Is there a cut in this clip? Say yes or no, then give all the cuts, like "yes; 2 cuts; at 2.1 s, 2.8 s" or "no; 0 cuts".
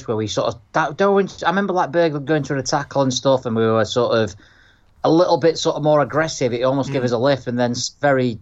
no; 0 cuts